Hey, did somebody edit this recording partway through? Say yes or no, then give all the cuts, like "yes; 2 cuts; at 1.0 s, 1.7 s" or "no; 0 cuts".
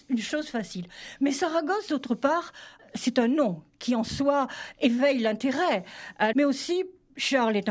yes; 2 cuts; at 2.8 s, 6.3 s